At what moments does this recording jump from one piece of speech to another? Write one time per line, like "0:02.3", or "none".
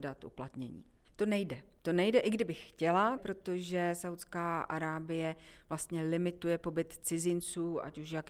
0:01.0
0:03.2